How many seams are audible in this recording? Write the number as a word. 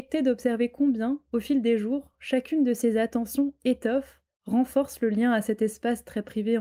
zero